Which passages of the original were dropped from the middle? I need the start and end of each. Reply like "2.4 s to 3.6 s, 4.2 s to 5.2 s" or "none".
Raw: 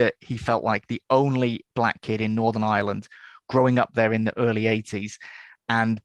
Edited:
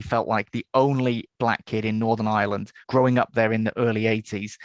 3.2 s to 3.4 s